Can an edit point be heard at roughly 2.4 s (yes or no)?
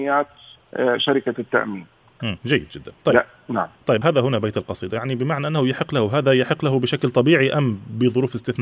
yes